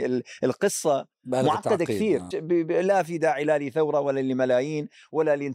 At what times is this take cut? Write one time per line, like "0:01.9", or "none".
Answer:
0:02.3

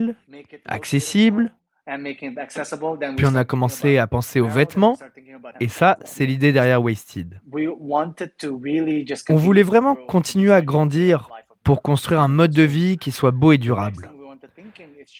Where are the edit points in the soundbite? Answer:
0:05.5

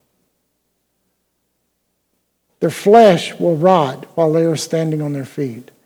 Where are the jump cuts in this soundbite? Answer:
0:02.5
0:04.6

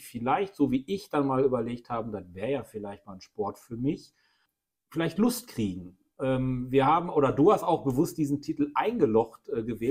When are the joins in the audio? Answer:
none

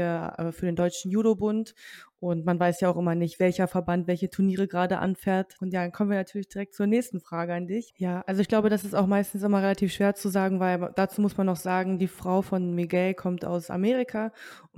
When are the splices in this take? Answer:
0:05.6
0:07.9

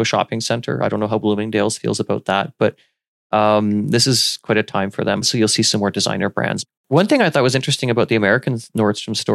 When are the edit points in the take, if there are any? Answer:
0:05.2
0:06.8

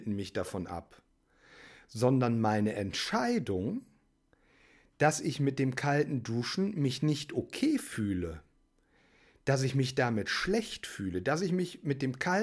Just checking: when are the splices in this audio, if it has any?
none

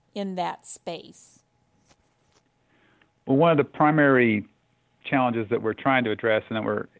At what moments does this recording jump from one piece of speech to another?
none

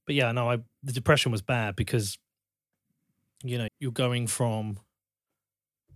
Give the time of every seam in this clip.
0:03.7

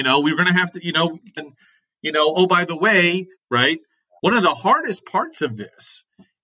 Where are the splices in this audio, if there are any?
0:01.4
0:03.4

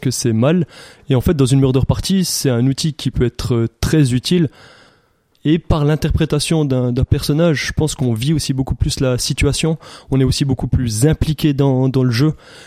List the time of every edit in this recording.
0:05.3

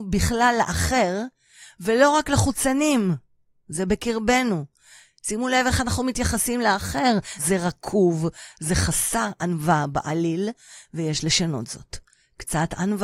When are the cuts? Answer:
0:07.4

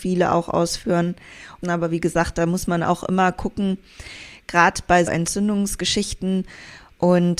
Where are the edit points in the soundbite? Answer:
0:01.6
0:05.1

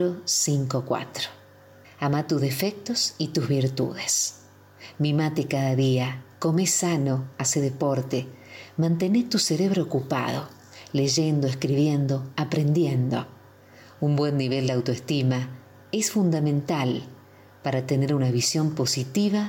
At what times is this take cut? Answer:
0:01.8

